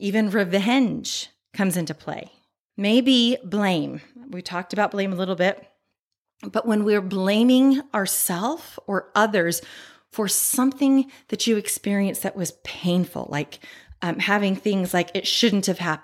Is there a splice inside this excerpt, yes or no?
no